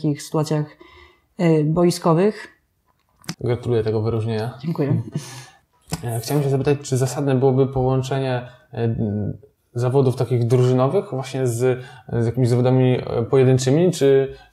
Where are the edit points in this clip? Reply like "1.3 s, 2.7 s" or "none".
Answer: 3.3 s